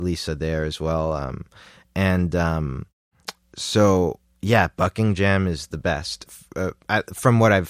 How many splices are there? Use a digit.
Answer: 1